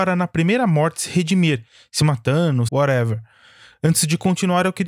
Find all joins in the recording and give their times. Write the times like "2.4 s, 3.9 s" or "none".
2.7 s